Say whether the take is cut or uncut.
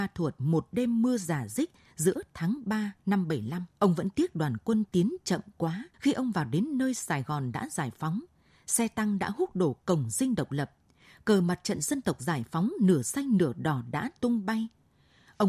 cut